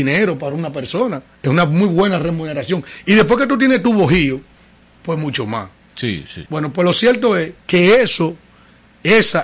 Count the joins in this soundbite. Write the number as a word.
two